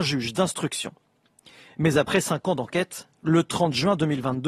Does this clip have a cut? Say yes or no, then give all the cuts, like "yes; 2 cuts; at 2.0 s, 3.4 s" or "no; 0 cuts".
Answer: no; 0 cuts